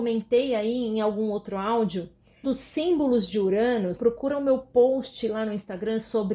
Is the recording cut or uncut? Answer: cut